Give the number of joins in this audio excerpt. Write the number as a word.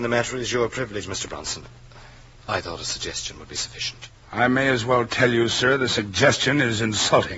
one